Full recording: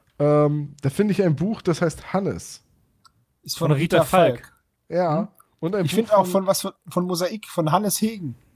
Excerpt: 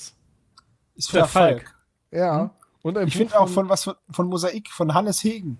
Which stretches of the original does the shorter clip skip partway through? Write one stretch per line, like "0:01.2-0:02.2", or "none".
0:03.6-0:03.9